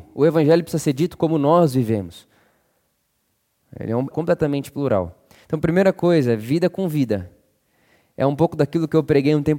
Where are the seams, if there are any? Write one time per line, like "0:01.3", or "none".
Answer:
0:04.1